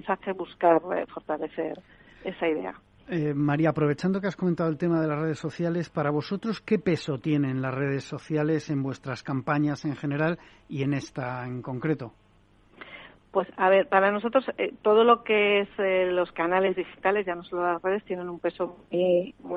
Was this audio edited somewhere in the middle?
no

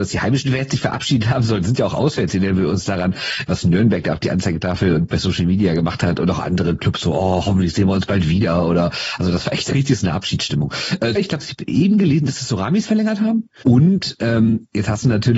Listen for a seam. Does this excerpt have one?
yes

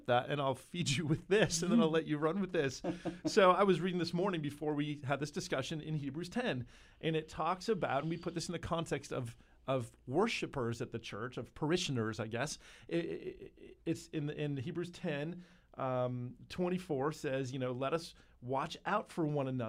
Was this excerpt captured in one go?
yes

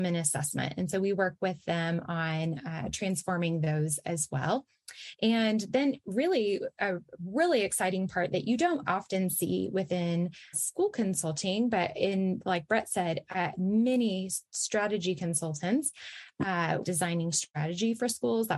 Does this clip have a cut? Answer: yes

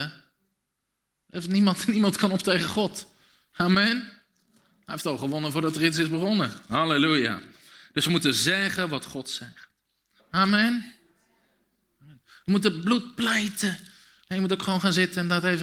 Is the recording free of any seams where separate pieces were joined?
no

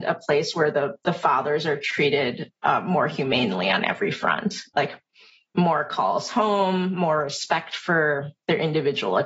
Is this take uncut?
yes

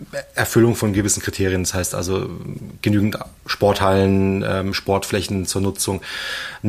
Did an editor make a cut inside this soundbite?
no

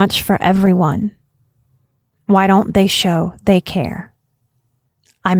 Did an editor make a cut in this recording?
no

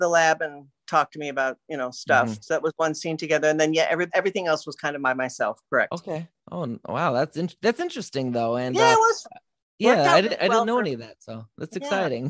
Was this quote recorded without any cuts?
no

